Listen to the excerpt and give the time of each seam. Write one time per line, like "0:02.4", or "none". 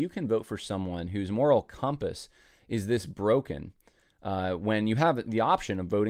none